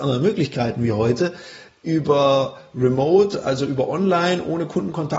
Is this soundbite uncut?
yes; 0 cuts

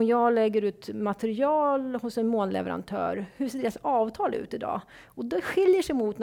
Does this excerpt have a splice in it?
no; 0 cuts

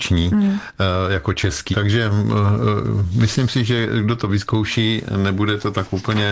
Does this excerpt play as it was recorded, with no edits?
no; 1 cut; at 1.7 s

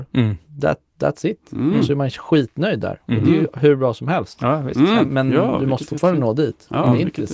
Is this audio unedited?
no; 1 cut; at 5.1 s

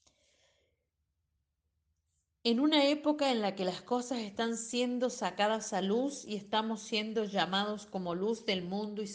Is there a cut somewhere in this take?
no; 0 cuts

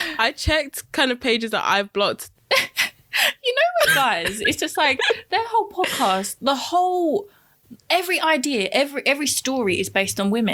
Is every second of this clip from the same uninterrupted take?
no; 1 cut; at 2.3 s

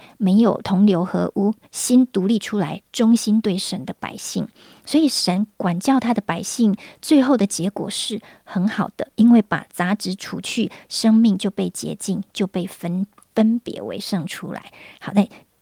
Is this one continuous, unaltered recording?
no; 1 cut; at 1.6 s

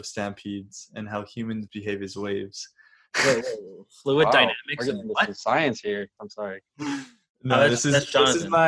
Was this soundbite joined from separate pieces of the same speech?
yes; 1 cut; at 6.2 s

